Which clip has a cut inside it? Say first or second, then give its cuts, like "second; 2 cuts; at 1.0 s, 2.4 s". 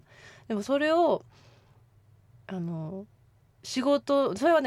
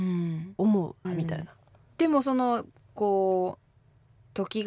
second; 1 cut; at 1.0 s